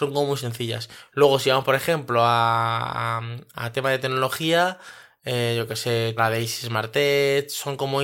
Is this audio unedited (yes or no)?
no